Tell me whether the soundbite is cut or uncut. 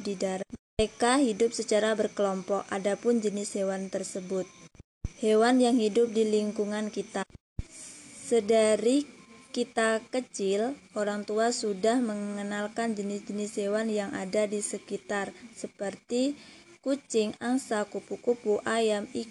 uncut